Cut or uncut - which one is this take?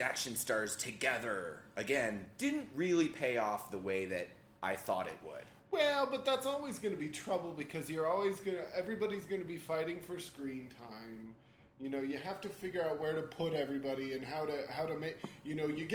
uncut